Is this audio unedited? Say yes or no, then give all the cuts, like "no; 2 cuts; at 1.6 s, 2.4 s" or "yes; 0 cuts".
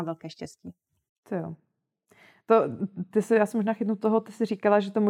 yes; 0 cuts